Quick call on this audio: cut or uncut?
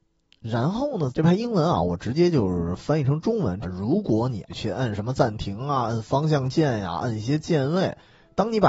cut